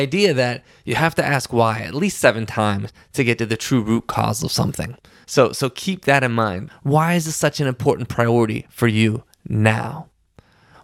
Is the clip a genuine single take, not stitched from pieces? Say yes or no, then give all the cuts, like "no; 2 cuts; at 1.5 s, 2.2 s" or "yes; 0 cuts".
no; 2 cuts; at 5.2 s, 6.7 s